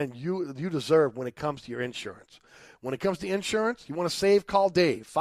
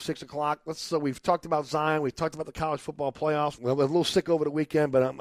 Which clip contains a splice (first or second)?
second